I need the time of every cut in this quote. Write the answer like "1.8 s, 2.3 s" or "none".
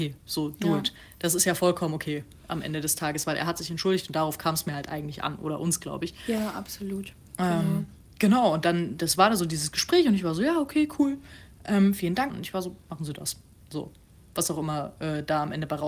12.3 s